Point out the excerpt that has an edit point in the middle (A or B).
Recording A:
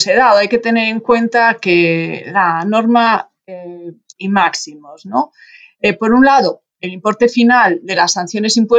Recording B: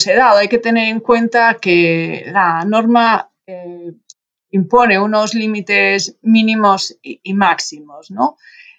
A